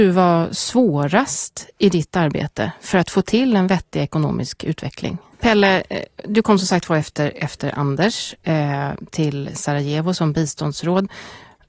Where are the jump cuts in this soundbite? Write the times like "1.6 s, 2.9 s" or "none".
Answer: 5.3 s

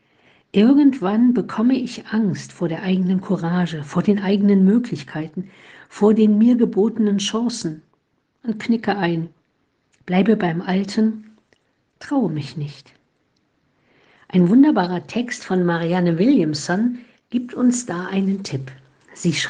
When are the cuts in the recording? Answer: none

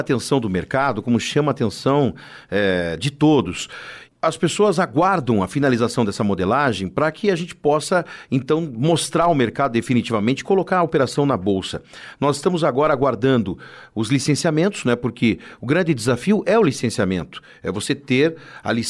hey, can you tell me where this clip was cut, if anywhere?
none

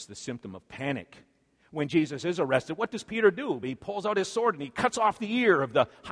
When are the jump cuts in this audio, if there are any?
none

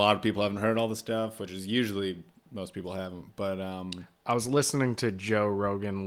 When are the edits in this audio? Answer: none

